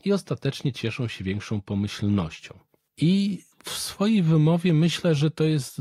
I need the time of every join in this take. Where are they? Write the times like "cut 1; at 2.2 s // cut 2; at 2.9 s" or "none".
none